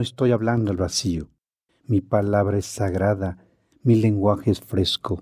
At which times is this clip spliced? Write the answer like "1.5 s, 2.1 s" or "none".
1.7 s, 3.7 s